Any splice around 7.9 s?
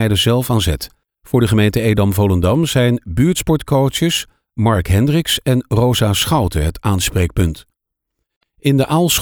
no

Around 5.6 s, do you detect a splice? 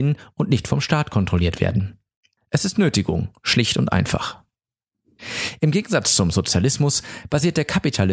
no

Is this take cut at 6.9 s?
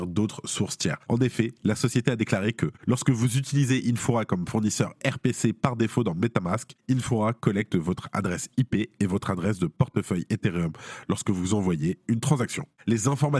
no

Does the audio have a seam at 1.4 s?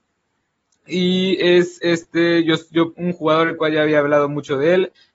no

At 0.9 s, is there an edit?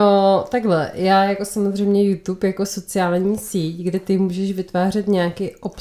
no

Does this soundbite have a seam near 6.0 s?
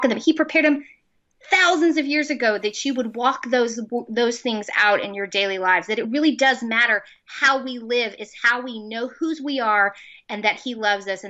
no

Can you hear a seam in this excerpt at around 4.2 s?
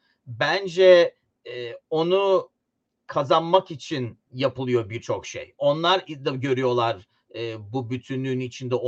yes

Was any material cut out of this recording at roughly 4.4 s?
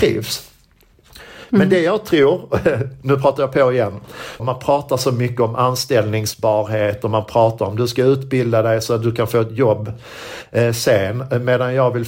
yes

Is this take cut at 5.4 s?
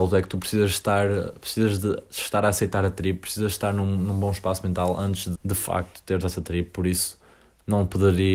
yes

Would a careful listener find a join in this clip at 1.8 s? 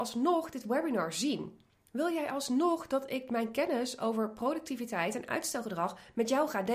no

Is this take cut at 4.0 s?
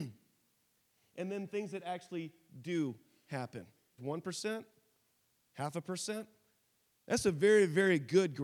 yes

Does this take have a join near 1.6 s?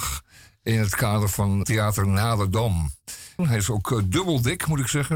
yes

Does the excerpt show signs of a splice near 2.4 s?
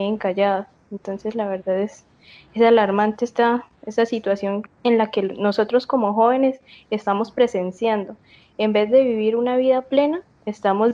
no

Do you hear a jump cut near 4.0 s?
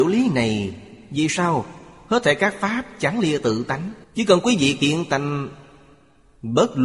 yes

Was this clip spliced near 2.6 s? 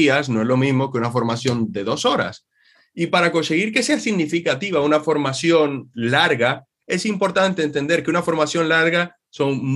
no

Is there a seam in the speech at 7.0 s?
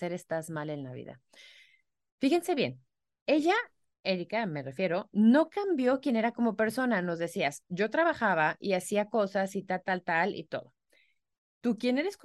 no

